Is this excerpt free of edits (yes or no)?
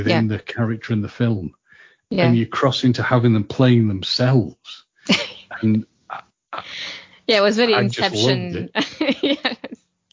yes